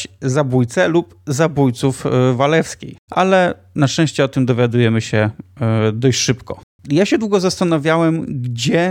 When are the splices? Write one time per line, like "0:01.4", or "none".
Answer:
0:03.1